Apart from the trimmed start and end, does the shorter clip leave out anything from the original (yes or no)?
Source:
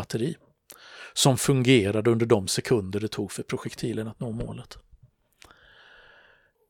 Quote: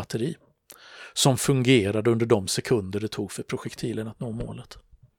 no